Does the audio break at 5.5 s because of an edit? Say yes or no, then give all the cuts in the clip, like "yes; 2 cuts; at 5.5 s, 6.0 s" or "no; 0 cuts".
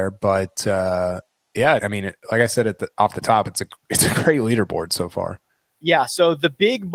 no; 1 cut; at 1.8 s